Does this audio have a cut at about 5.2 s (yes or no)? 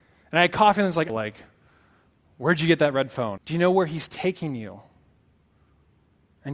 no